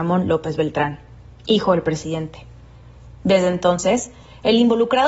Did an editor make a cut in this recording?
no; 0 cuts

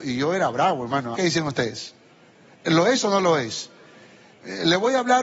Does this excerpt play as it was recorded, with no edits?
no; 1 cut; at 1.1 s

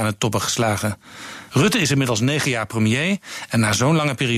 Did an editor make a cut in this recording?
yes; 1 cut; at 1.5 s

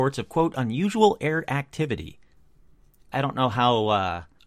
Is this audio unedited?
no; 1 cut; at 3.1 s

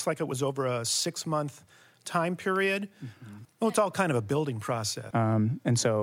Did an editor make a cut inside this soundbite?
yes; 2 cuts; at 3.4 s, 5.1 s

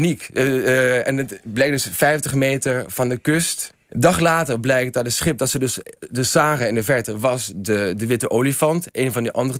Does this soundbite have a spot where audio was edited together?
yes; 1 cut; at 3.9 s

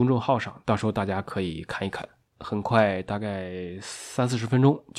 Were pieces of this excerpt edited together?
yes; 1 cut; at 2.3 s

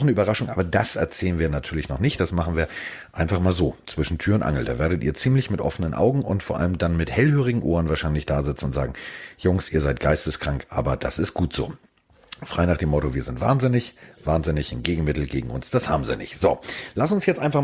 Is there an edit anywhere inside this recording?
no; 0 cuts

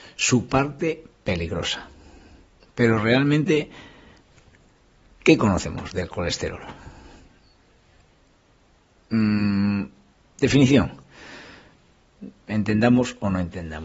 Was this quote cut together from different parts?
no; 0 cuts

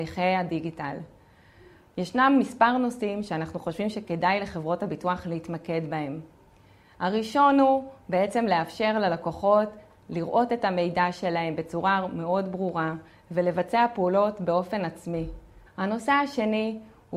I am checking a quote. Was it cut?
yes; 1 cut; at 15.7 s

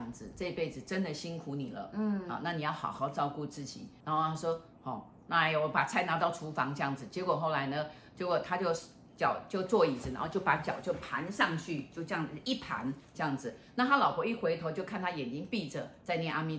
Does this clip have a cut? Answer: no; 0 cuts

